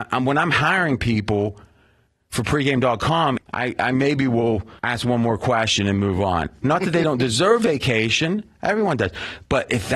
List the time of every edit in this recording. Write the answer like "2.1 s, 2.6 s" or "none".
3.4 s, 4.8 s